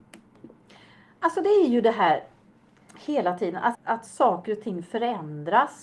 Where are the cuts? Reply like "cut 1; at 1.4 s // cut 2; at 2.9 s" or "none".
cut 1; at 3.7 s